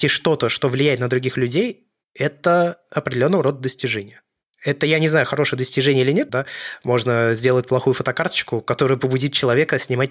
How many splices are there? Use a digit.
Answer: 1